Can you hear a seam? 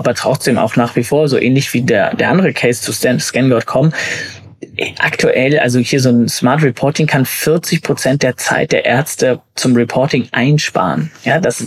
no; 0 cuts

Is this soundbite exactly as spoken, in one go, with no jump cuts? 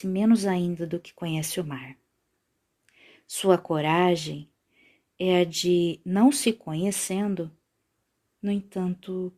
yes; 0 cuts

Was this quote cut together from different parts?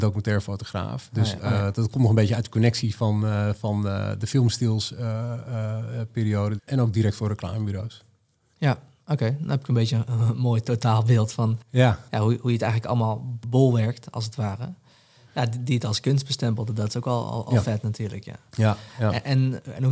yes; 3 cuts; at 1.4 s, 6.6 s, 15.3 s

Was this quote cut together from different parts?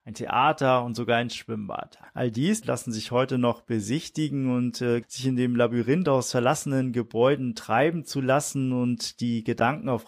yes; 2 cuts; at 2.6 s, 5.0 s

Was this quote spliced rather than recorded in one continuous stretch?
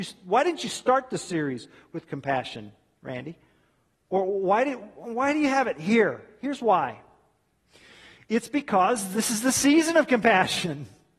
no; 0 cuts

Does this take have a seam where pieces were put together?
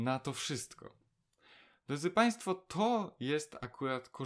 no; 0 cuts

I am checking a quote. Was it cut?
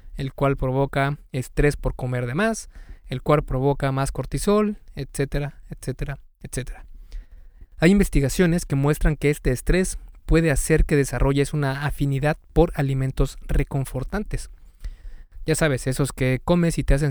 yes; 1 cut; at 7.6 s

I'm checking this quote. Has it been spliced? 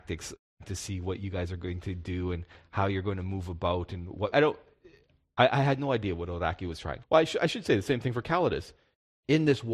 yes; 2 cuts; at 4.3 s, 7.0 s

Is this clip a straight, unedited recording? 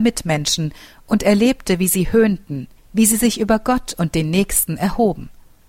no; 1 cut; at 2.8 s

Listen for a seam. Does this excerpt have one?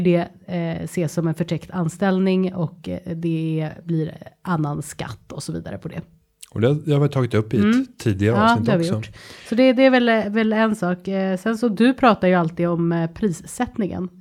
no; 0 cuts

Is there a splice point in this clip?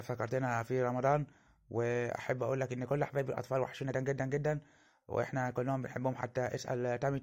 yes; 1 cut; at 3.9 s

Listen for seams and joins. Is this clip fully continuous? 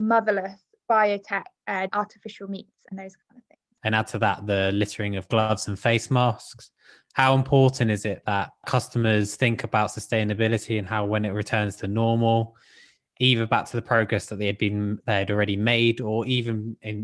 no; 2 cuts; at 1.9 s, 3.8 s

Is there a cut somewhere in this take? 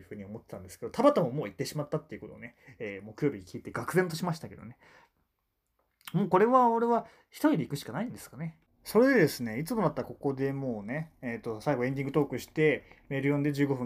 yes; 1 cut; at 8.7 s

